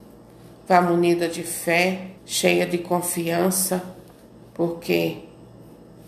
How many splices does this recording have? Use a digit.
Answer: 1